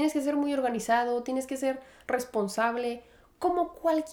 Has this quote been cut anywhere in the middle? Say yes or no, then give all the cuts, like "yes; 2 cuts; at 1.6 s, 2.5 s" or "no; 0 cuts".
no; 0 cuts